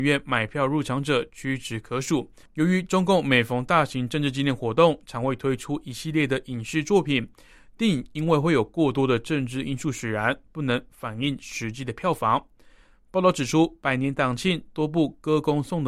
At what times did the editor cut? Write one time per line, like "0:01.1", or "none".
0:02.4